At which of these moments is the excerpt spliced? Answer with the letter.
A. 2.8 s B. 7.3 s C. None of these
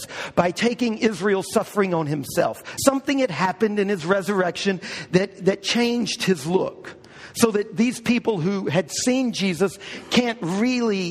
A